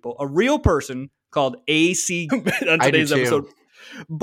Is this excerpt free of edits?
no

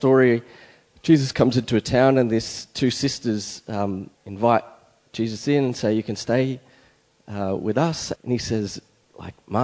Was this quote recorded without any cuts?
no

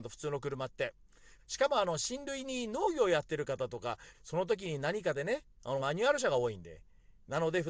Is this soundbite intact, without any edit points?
no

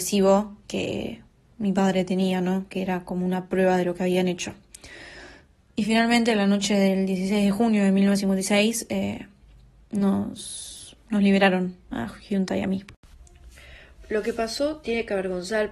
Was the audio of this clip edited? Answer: no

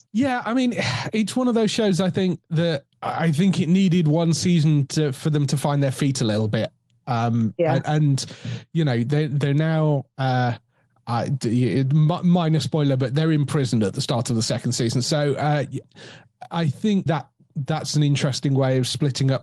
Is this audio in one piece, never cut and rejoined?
no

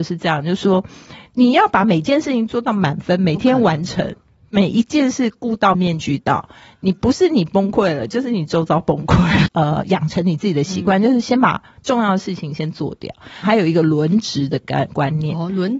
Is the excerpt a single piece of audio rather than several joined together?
no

